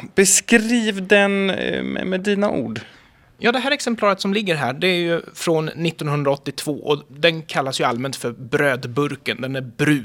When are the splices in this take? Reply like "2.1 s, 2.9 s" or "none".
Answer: none